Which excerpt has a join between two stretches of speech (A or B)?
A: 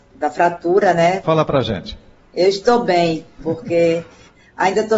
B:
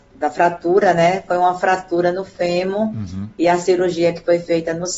A